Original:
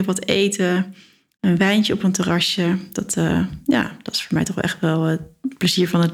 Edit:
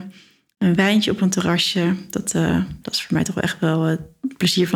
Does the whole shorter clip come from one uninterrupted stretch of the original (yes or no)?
no